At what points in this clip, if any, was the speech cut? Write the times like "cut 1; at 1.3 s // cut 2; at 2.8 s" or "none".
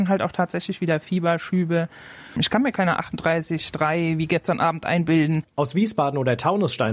cut 1; at 2.4 s // cut 2; at 5.5 s

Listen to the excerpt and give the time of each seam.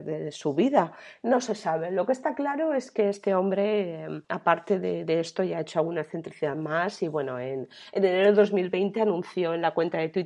none

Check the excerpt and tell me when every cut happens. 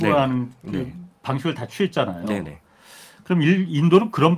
none

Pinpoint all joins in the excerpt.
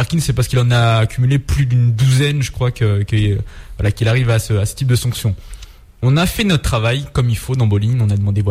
none

